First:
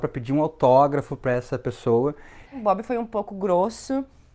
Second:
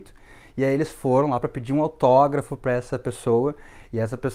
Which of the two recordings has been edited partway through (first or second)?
first